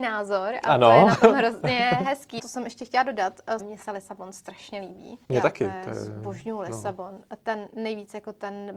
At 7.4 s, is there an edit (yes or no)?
no